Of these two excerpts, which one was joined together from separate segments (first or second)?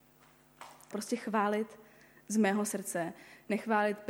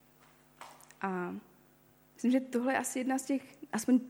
first